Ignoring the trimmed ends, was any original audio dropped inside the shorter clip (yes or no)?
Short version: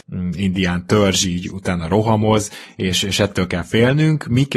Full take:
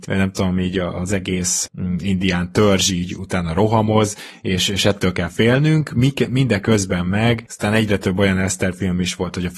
no